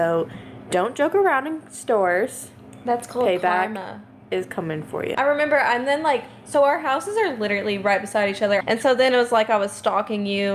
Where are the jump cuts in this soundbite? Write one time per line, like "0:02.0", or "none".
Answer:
0:05.1
0:08.6